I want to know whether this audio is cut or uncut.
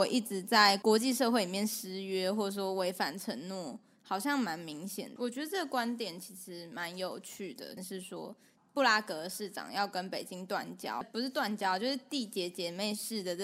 cut